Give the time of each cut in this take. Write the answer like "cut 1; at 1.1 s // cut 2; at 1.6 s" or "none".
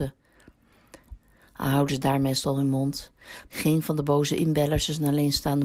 cut 1; at 1.1 s // cut 2; at 3.5 s